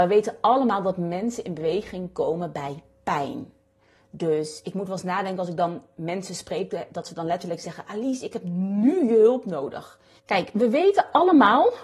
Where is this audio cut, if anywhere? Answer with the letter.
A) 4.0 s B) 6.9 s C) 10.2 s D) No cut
C